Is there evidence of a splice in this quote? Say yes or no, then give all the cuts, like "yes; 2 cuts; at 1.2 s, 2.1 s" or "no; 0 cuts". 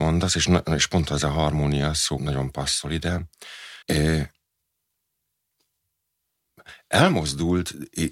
yes; 2 cuts; at 2.2 s, 3.8 s